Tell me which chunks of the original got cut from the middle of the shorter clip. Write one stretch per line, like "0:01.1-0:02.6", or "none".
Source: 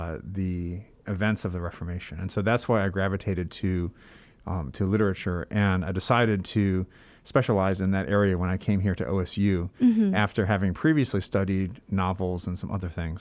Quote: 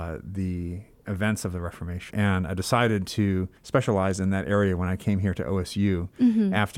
0:02.1-0:05.5
0:06.9-0:07.2